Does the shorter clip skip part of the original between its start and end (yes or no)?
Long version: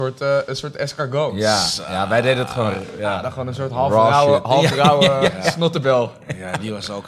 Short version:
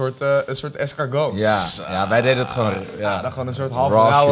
no